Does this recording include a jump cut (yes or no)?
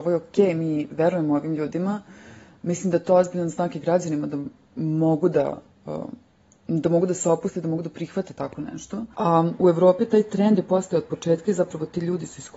yes